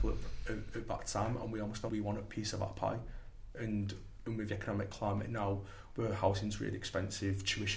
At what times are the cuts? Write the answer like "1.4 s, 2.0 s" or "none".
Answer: 1.9 s